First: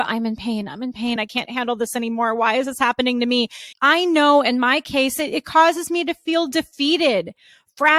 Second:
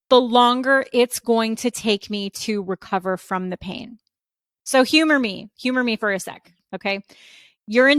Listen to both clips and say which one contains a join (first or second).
first